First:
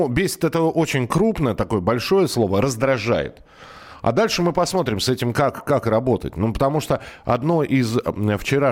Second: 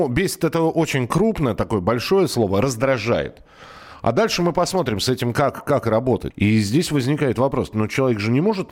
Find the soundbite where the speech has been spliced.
second; 1 cut; at 6.3 s

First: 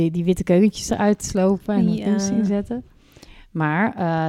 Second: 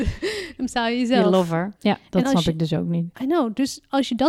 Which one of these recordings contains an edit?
second; 1 cut; at 1.8 s

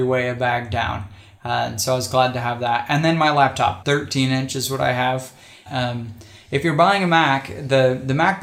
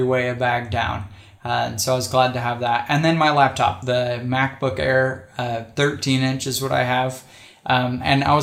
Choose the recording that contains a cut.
first; 2 cuts; at 3.8 s, 5.7 s

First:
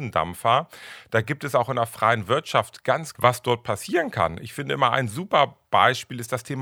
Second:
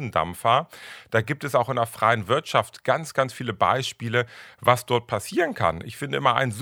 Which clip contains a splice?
first; 1 cut; at 3.1 s

